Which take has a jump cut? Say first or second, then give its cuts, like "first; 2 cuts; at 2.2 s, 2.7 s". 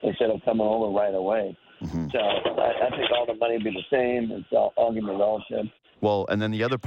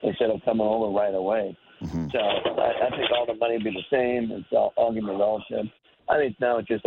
first; 1 cut; at 5.9 s